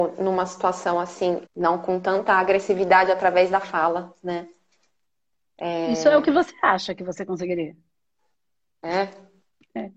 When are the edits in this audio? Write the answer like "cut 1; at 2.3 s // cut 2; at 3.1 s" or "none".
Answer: cut 1; at 1.5 s